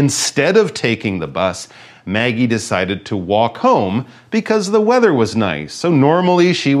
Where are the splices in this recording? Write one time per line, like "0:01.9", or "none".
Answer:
none